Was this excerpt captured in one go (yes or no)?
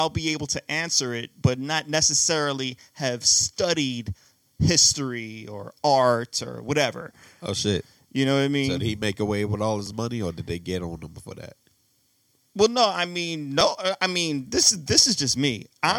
yes